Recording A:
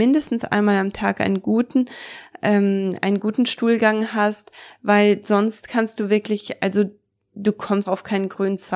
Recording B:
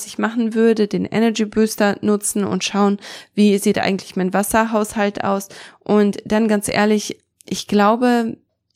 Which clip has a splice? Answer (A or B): A